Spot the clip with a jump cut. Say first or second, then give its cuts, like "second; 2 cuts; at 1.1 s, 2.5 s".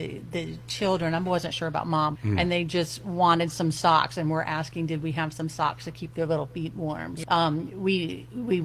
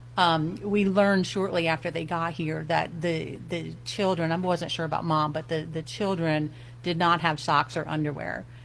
first; 2 cuts; at 2.2 s, 7.2 s